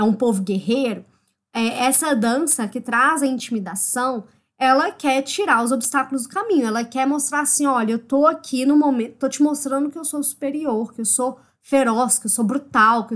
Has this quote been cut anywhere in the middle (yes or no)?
no